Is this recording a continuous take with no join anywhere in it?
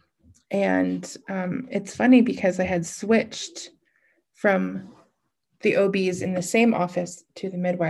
yes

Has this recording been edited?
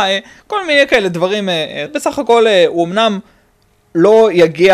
yes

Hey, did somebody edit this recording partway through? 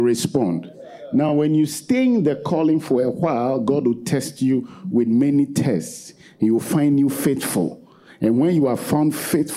no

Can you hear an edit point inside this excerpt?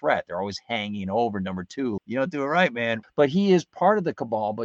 yes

